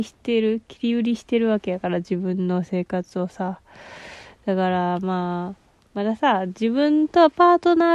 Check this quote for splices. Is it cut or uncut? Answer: uncut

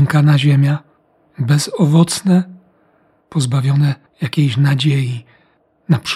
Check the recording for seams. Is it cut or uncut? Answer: cut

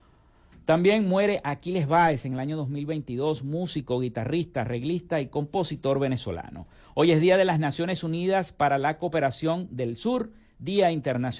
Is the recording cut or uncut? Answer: uncut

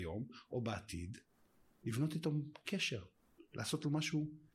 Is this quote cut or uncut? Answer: uncut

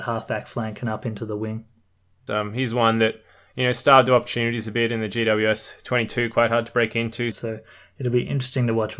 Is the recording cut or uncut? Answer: cut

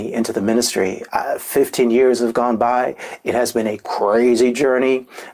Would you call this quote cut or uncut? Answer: uncut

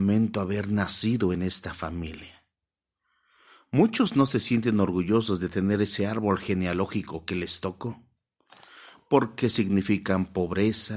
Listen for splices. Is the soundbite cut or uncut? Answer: uncut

